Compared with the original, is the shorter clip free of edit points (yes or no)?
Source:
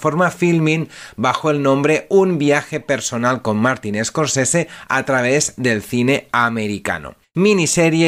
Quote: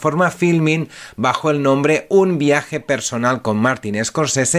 yes